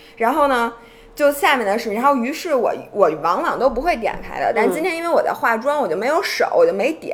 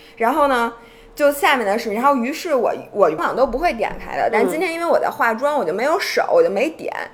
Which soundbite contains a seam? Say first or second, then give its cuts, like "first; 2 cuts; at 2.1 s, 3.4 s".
second; 1 cut; at 3.2 s